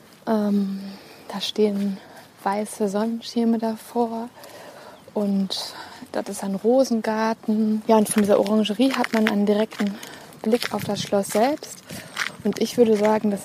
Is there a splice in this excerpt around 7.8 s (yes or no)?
yes